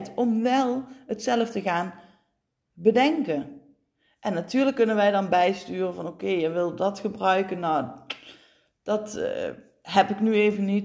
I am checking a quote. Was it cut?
no; 0 cuts

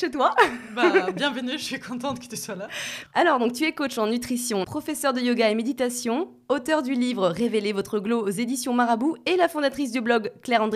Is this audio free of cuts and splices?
no; 1 cut; at 4.6 s

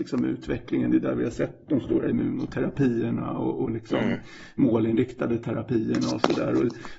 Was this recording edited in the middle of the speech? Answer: no; 0 cuts

